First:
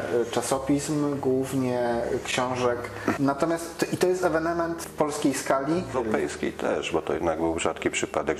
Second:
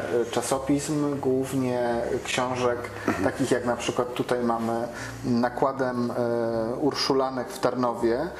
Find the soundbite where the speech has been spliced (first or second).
first